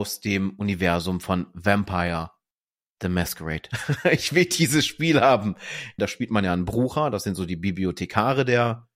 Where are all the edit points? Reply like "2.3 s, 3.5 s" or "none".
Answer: 3.7 s, 6.0 s